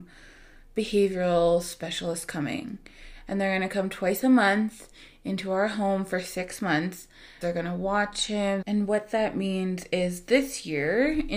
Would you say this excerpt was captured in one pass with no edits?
no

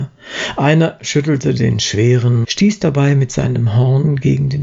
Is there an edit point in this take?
yes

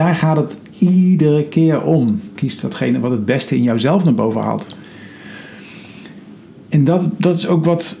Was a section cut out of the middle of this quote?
yes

